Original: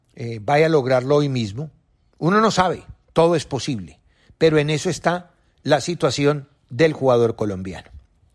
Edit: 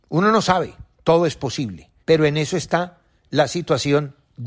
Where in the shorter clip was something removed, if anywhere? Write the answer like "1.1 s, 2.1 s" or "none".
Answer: 2.0 s